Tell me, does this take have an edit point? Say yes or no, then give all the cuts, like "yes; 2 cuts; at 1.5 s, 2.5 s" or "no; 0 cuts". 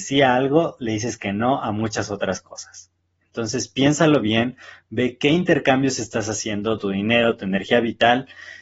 yes; 1 cut; at 6.8 s